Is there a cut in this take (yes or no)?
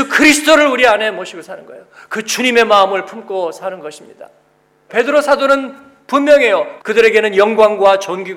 yes